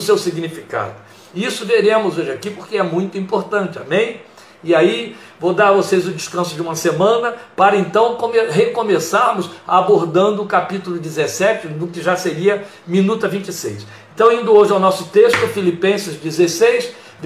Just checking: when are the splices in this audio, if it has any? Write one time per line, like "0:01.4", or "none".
none